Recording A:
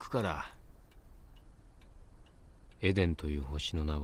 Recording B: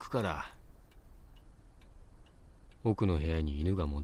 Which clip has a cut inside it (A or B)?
A